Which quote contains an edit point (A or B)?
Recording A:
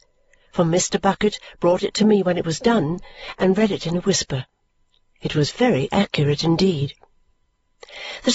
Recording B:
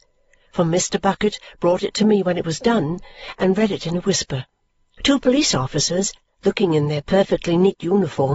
B